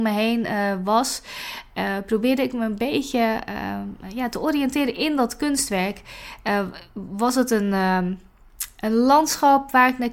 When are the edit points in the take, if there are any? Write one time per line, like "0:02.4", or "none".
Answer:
none